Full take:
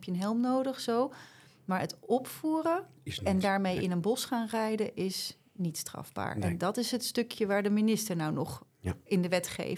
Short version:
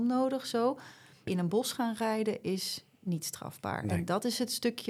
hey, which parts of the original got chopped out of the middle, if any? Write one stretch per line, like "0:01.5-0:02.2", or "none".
0:01.6-0:03.8